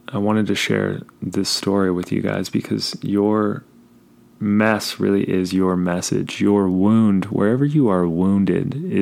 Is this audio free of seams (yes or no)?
yes